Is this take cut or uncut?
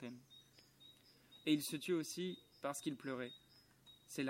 uncut